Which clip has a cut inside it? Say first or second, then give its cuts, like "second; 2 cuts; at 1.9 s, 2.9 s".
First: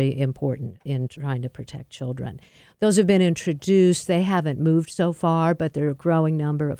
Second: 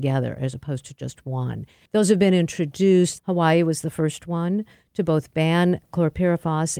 second; 2 cuts; at 1.9 s, 3.2 s